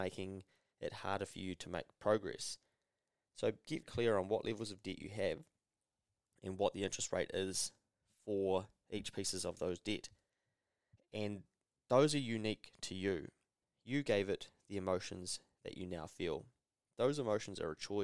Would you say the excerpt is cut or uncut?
cut